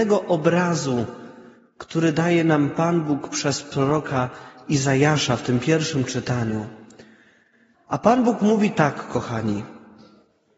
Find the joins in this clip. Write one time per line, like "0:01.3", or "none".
0:07.7